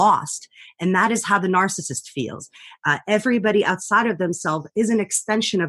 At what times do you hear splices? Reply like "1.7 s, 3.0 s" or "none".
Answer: none